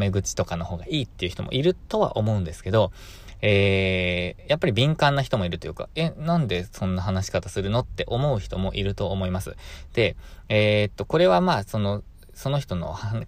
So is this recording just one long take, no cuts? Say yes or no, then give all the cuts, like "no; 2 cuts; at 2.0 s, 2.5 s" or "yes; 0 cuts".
yes; 0 cuts